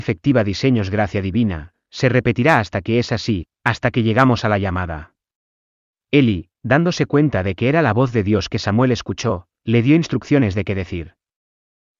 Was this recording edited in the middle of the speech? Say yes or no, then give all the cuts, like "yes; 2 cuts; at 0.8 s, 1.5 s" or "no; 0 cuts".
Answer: no; 0 cuts